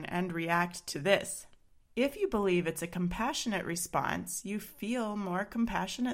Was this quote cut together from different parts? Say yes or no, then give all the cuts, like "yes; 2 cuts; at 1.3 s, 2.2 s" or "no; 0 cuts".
no; 0 cuts